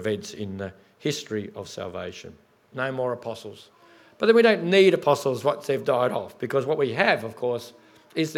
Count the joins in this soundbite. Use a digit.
1